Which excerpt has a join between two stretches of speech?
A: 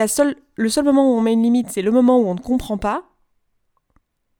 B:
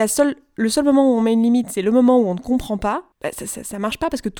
B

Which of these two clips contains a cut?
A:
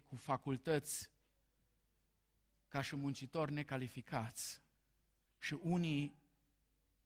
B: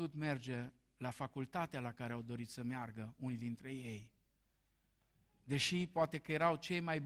A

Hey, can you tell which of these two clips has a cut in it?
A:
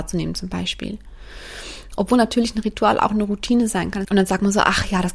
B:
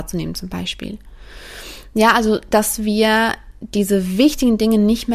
A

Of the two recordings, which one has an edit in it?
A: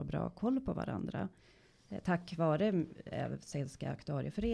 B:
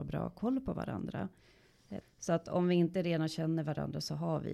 B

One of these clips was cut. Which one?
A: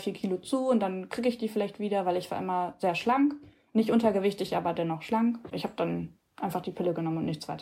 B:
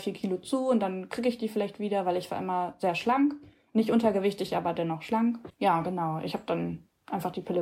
A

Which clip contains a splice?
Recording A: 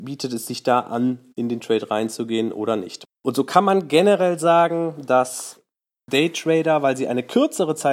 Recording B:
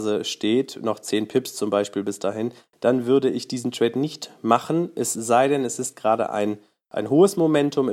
A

